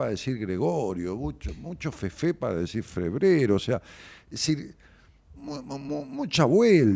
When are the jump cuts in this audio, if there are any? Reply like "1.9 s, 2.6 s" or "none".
5.4 s